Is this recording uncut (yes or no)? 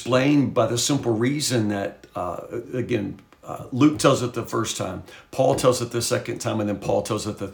yes